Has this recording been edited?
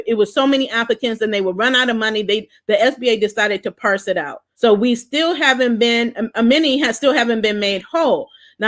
yes; 1 cut; at 4.5 s

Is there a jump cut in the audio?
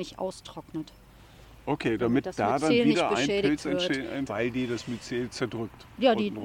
yes; 1 cut; at 4.3 s

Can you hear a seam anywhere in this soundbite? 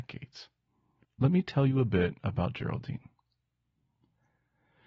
yes; 1 cut; at 1.0 s

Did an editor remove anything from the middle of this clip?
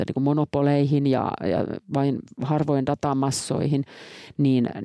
no; 0 cuts

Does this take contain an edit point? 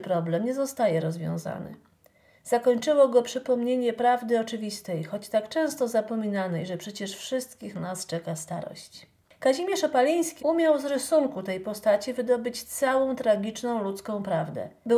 yes; 1 cut; at 10.4 s

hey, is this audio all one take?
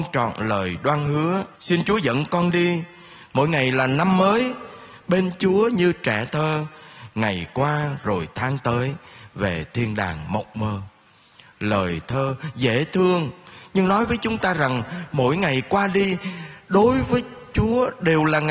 no; 1 cut; at 1.5 s

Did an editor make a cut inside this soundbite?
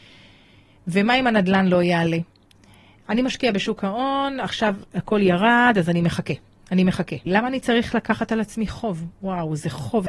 no; 0 cuts

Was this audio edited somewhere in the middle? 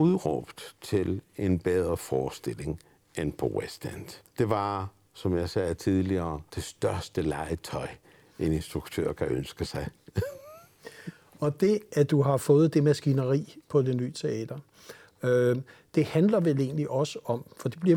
yes; 2 cuts; at 4.3 s, 6.5 s

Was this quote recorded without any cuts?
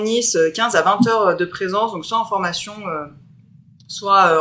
yes; 0 cuts

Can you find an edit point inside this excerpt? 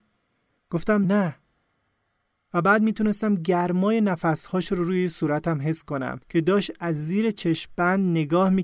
yes; 2 cuts; at 1.0 s, 6.2 s

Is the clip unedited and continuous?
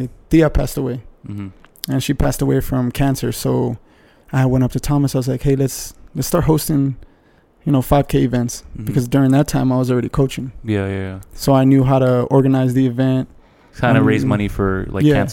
yes; 0 cuts

